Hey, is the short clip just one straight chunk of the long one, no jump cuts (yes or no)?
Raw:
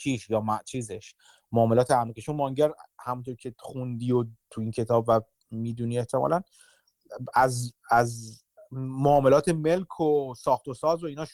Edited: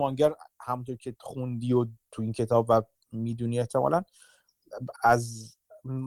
no